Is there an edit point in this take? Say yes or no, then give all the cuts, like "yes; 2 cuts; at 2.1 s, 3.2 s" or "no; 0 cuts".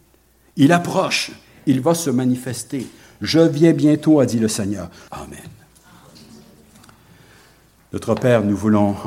yes; 1 cut; at 5.1 s